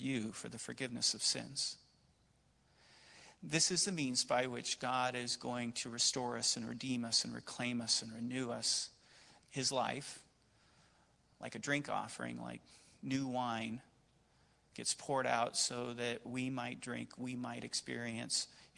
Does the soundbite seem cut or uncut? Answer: cut